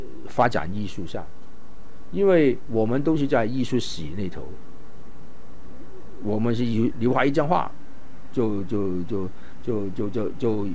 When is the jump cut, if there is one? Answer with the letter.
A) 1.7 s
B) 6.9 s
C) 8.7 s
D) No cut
B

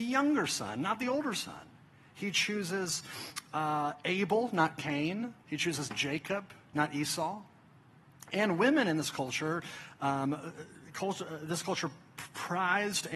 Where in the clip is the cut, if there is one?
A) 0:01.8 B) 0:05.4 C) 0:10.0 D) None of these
B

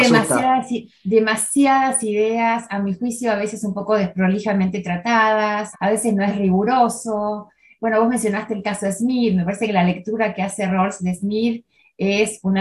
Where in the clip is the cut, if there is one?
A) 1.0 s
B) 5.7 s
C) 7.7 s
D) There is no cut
B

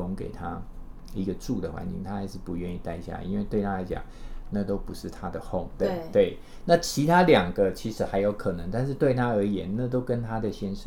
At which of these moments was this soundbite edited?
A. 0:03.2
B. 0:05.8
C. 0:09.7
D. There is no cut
B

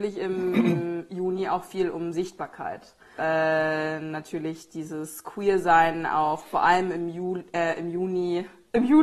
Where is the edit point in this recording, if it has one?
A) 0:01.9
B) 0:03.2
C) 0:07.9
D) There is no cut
B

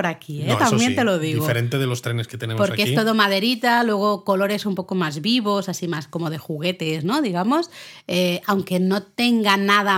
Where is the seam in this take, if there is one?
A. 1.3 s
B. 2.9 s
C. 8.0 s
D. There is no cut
D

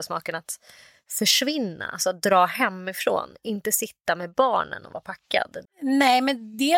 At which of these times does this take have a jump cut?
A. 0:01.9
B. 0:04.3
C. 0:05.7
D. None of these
C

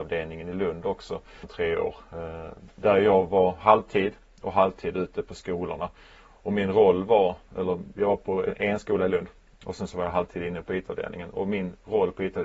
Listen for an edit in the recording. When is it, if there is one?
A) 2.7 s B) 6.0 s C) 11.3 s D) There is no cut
D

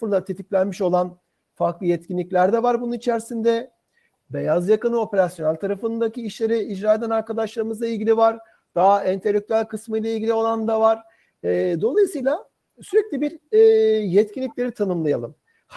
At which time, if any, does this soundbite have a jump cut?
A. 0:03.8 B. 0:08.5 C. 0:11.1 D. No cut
D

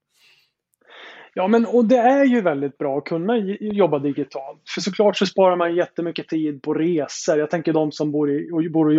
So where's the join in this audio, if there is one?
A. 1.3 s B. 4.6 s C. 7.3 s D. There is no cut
D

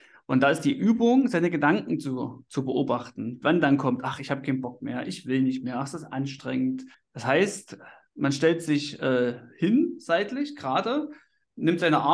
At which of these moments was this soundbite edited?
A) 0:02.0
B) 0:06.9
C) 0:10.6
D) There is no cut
B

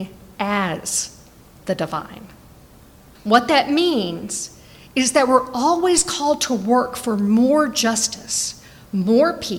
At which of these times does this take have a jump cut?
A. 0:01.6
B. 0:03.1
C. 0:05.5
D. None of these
B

